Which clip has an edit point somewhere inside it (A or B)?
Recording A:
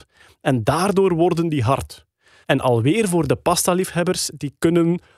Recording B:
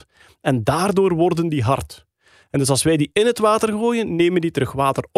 A